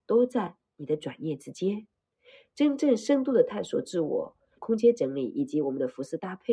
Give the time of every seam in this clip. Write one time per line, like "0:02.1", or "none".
0:04.6